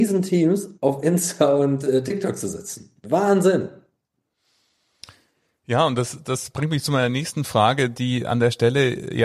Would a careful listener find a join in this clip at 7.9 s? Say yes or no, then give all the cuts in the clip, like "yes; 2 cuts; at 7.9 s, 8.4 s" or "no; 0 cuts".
no; 1 cut; at 6.2 s